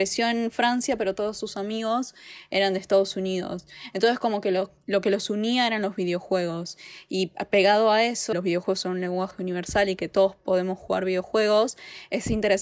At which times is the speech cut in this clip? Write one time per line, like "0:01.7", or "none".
0:08.3